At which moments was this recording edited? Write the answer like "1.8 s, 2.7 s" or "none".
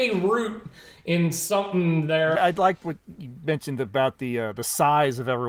2.4 s